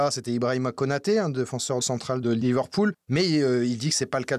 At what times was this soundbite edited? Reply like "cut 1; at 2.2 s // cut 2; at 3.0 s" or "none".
cut 1; at 3.0 s